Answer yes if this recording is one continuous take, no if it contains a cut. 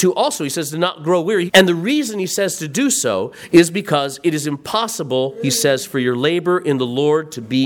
no